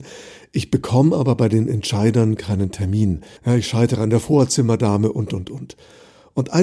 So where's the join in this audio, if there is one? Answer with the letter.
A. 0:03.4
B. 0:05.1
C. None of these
A